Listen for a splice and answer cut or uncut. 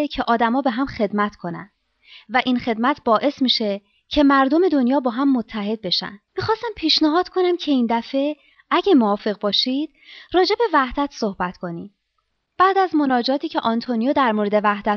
uncut